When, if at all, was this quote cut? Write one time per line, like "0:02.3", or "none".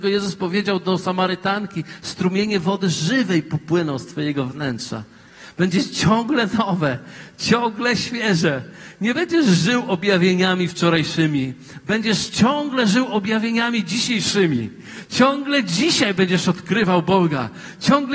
none